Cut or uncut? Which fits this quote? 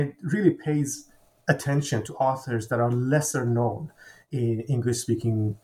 uncut